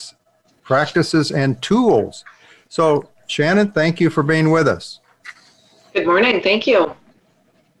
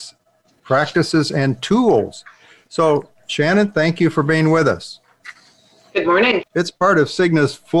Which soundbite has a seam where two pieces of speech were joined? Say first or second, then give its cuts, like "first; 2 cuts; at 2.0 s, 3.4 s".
second; 1 cut; at 6.4 s